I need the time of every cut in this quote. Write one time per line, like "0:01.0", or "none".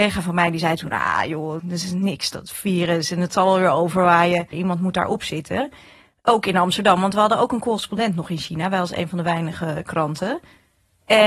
0:01.6
0:04.5